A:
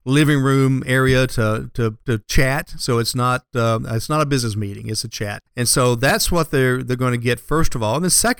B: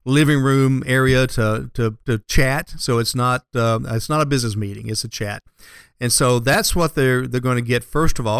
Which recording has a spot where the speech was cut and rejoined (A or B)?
A